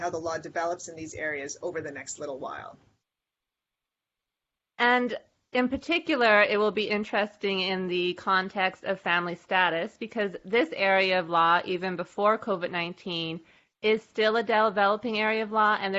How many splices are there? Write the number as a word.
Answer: zero